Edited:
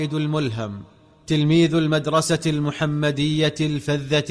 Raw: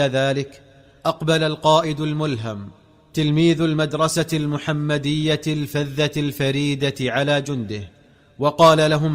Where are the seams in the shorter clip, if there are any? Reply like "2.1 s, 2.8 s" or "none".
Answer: none